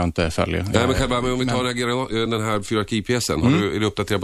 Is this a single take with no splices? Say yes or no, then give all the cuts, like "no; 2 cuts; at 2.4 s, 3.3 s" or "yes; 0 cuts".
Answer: yes; 0 cuts